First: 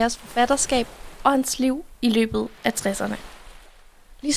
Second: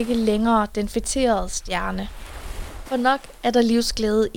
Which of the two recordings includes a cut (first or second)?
second